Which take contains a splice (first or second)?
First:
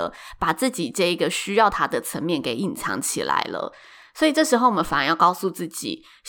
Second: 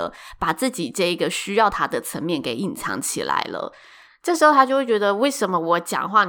second